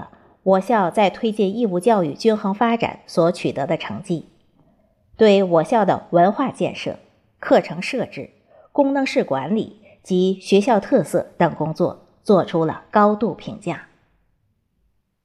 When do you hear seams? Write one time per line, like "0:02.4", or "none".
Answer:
none